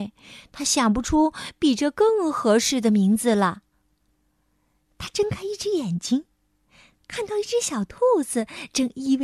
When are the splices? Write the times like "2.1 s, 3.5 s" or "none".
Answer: 4.8 s